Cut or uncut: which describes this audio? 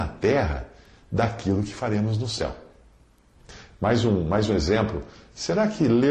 uncut